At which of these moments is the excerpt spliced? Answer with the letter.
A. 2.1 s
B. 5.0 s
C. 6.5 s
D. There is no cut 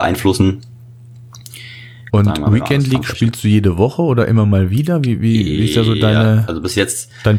A